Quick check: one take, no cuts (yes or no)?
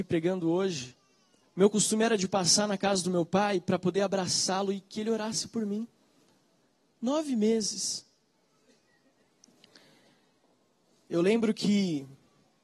no